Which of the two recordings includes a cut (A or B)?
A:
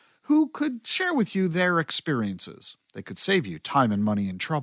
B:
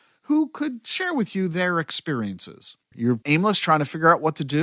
B